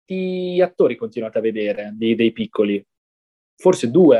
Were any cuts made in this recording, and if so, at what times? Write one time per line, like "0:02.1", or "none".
none